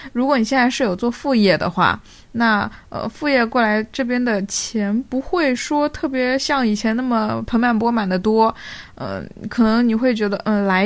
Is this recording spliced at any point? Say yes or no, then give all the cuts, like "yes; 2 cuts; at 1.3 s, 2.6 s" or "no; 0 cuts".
no; 0 cuts